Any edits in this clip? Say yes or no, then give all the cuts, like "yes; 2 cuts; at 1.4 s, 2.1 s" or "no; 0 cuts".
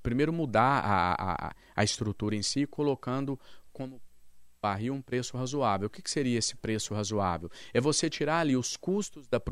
no; 0 cuts